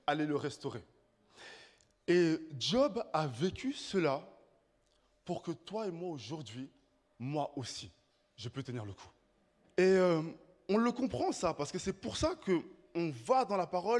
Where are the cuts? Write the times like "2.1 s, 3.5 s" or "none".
7.1 s, 9.6 s